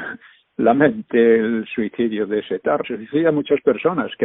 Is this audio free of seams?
no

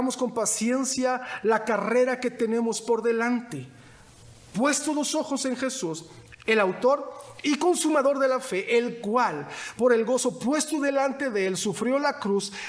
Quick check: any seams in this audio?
no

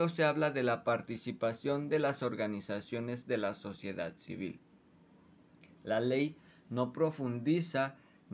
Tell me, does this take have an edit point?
no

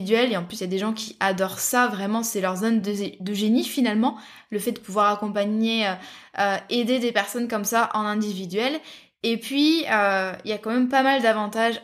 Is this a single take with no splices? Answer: yes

